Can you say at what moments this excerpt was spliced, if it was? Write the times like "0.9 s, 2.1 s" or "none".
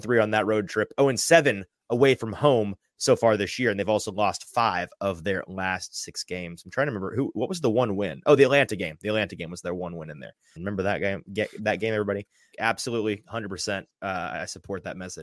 10.6 s, 12.5 s